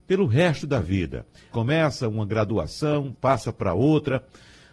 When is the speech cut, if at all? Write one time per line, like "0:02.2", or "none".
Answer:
0:01.5
0:03.1